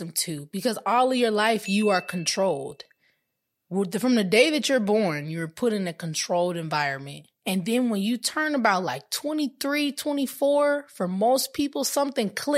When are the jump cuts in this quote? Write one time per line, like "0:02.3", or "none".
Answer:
0:07.4